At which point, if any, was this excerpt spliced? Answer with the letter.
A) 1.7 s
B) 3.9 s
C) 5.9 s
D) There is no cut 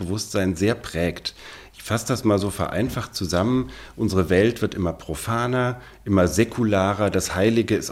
D